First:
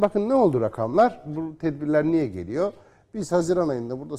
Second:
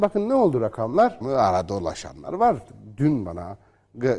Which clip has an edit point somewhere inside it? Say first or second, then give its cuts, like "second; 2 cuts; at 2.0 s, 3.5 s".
second; 1 cut; at 1.2 s